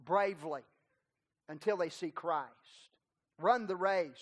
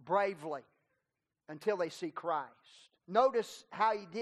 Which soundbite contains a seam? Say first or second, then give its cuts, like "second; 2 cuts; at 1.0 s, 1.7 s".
second; 1 cut; at 3.0 s